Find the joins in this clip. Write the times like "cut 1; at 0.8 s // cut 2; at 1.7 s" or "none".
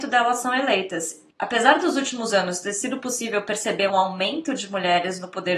cut 1; at 1.3 s // cut 2; at 3.9 s